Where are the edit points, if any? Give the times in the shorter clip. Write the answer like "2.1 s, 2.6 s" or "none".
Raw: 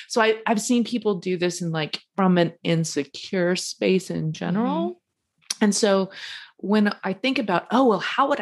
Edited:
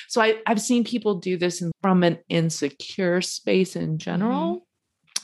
1.7 s